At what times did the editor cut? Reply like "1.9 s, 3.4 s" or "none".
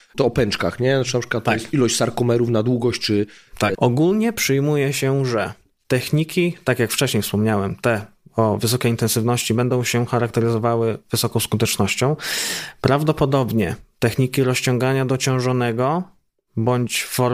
3.7 s